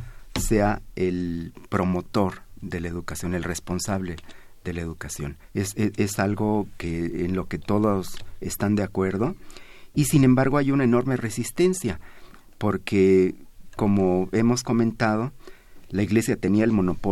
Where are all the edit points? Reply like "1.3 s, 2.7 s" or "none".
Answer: 5.4 s

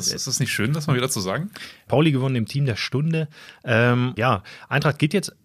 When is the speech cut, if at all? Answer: 1.9 s, 4.2 s

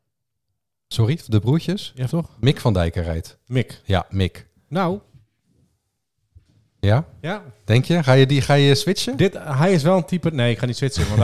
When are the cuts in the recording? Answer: 2.1 s

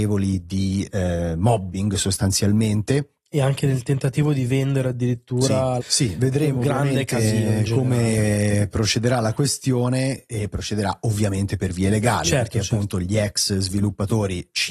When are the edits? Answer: 5.8 s

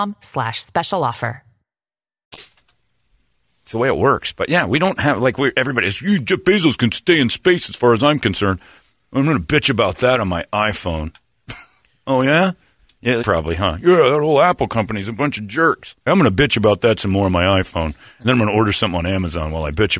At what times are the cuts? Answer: 13.2 s, 16.1 s

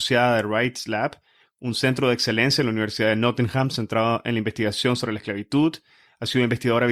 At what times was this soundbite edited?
none

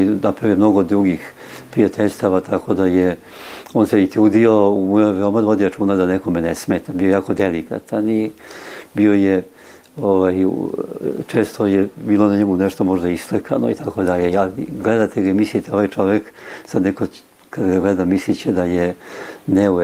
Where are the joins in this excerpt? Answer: none

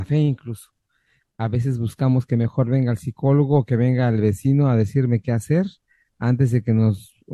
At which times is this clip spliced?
none

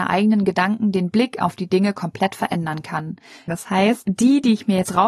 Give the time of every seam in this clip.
3.5 s

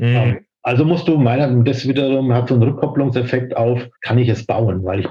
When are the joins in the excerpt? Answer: 3.9 s

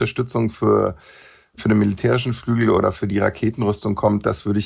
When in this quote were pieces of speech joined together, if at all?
none

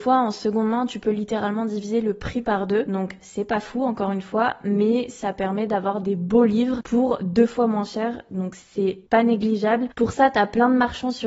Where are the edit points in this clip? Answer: 9.1 s

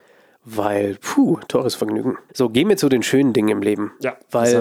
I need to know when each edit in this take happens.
2.3 s

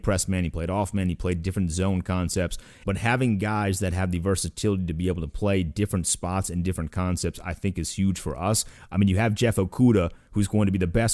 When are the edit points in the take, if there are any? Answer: 2.8 s, 8.9 s

